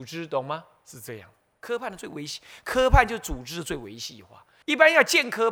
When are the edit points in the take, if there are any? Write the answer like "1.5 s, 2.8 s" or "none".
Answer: 4.6 s